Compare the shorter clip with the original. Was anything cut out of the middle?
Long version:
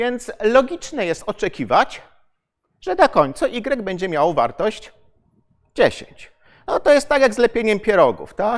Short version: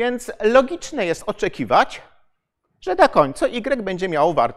no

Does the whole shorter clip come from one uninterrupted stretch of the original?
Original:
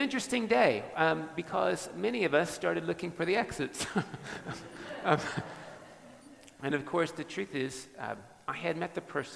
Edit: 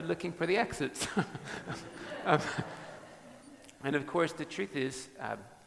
yes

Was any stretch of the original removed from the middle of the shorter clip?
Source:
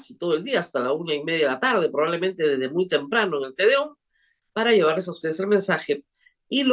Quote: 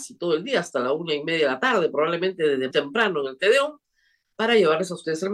yes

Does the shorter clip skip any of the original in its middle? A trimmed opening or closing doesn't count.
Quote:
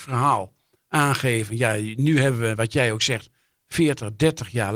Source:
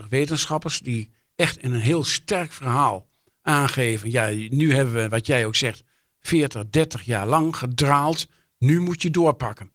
no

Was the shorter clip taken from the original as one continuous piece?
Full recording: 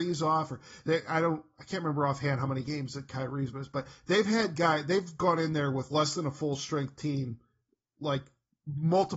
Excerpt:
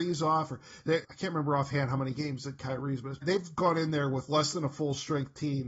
no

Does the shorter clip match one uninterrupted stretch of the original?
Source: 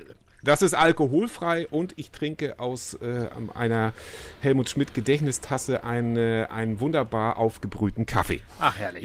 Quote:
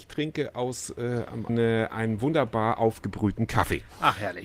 no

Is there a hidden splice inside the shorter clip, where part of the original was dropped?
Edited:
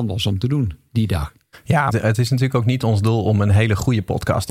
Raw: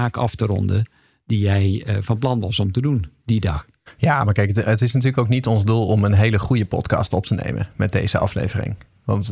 yes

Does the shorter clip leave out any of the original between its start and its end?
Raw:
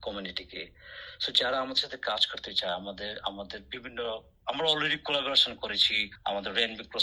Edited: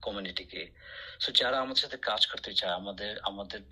no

